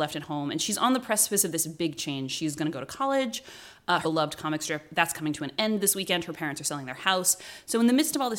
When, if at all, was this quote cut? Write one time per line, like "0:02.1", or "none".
0:04.0